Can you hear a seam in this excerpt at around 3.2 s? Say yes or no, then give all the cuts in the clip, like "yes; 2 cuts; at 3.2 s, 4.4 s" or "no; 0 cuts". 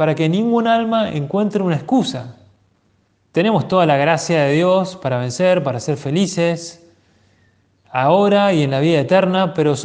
yes; 1 cut; at 3.2 s